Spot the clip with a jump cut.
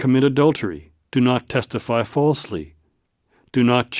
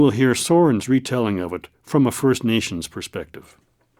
first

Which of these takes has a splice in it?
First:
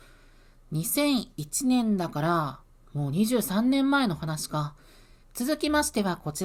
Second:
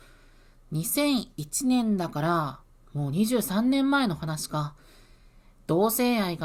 first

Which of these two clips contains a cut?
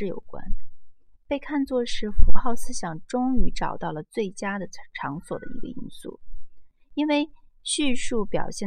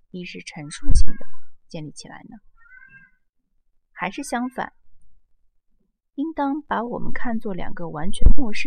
first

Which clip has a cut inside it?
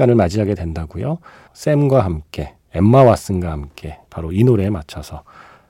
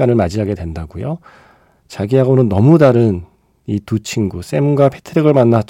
first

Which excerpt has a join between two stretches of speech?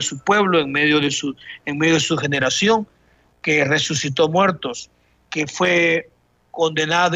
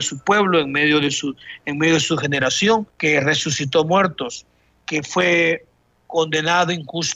second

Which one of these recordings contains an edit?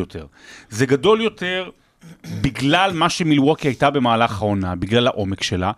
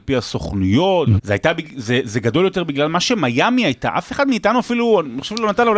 second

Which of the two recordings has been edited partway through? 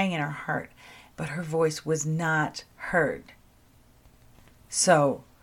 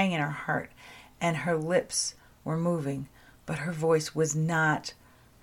first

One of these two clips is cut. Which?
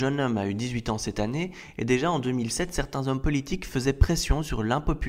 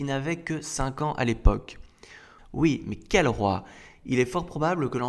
second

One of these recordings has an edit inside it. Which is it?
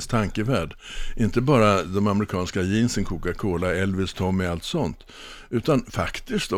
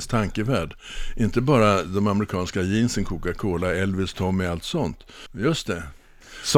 second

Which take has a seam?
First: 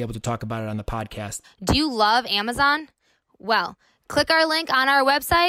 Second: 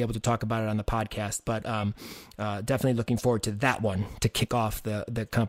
first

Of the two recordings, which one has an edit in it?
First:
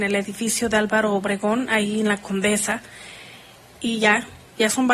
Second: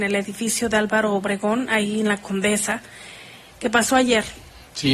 second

